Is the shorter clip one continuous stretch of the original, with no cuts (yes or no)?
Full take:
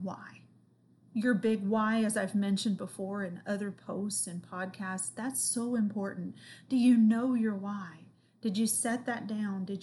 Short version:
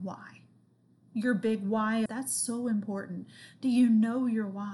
no